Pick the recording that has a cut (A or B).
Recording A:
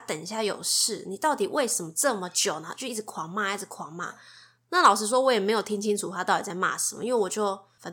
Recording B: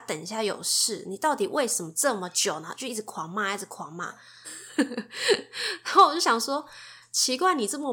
B